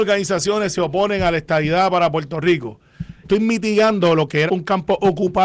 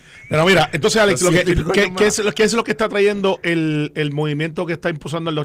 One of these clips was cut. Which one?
first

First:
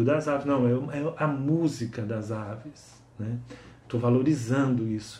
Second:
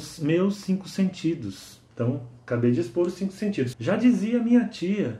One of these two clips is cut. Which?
second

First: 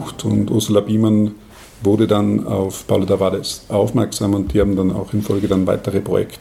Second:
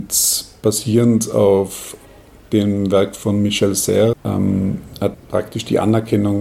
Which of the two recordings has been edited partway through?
second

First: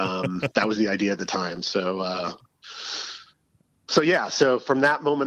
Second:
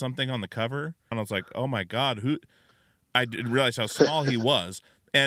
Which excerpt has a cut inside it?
second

